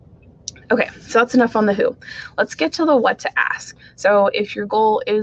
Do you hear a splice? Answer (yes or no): yes